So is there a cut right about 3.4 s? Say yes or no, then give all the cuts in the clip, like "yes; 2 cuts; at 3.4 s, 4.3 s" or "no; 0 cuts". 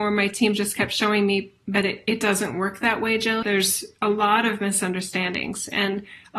yes; 1 cut; at 3.4 s